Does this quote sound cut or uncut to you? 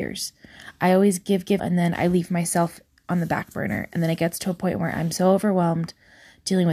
cut